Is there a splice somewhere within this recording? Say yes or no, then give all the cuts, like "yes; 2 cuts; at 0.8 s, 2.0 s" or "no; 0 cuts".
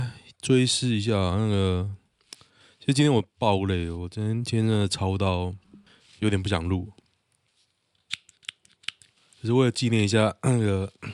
no; 0 cuts